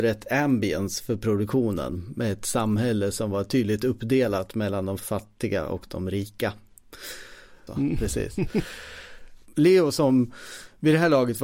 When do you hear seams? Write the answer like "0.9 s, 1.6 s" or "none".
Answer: 7.7 s